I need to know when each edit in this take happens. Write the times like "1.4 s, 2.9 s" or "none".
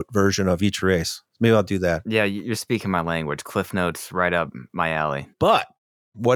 5.3 s

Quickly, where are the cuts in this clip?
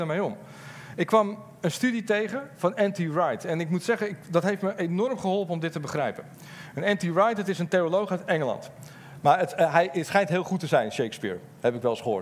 9.2 s

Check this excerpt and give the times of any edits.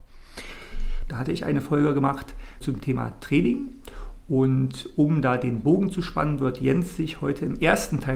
1.1 s

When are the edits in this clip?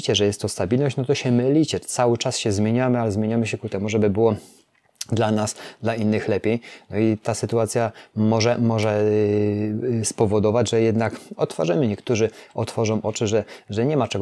none

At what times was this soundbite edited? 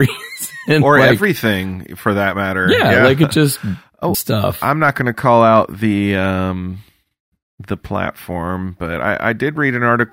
4.1 s

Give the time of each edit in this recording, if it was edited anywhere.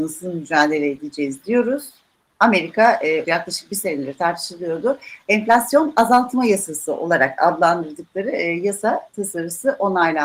3.2 s

